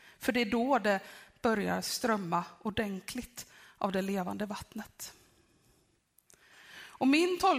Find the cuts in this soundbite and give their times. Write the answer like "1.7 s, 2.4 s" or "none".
none